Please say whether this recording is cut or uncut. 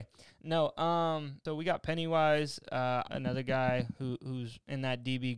cut